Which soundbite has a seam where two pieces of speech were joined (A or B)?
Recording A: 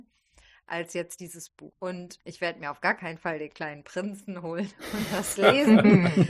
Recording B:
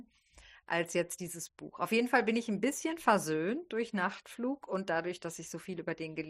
A